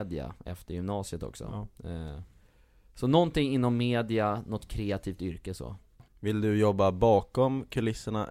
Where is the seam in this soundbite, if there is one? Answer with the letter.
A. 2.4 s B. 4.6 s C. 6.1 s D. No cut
C